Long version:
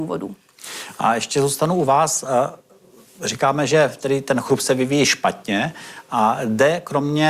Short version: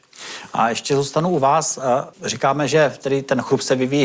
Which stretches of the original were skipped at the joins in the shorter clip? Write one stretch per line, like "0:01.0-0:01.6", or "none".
0:02.6-0:03.1